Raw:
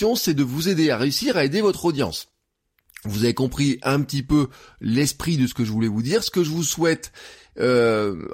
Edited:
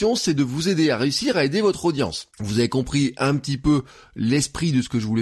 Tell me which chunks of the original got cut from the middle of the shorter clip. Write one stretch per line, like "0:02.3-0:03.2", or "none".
0:02.3-0:03.0